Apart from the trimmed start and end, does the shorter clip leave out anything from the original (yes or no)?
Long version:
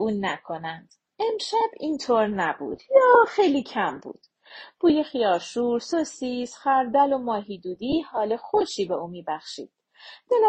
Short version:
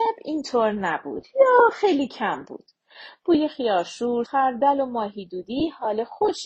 yes